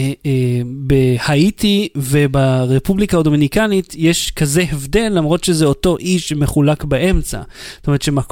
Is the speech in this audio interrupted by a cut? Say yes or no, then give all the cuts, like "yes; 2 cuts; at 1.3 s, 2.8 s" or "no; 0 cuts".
no; 0 cuts